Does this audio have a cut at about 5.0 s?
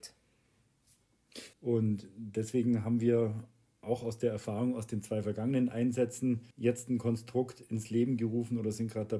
no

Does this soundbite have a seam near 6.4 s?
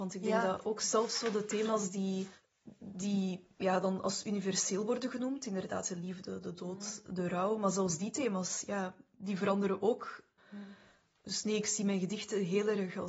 no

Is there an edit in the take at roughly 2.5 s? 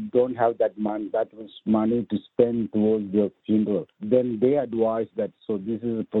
no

